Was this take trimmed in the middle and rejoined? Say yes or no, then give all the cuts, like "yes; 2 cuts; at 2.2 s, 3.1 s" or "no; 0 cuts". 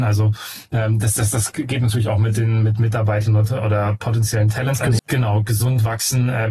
yes; 1 cut; at 5.0 s